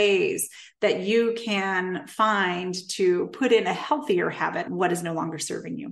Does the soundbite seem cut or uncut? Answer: cut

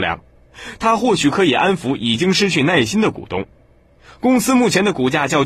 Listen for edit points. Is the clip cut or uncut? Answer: uncut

